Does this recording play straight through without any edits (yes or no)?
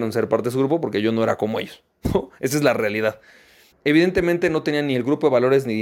no